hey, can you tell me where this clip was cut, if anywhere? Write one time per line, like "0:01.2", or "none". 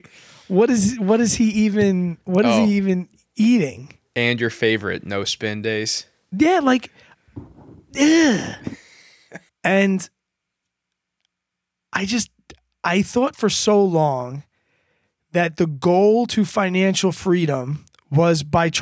0:09.5